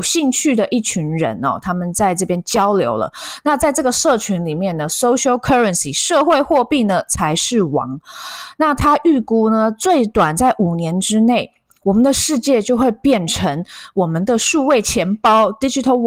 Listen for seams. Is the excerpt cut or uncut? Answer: uncut